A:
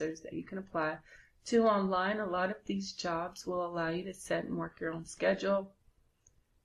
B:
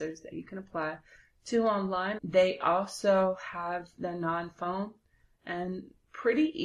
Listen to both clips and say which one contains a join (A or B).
B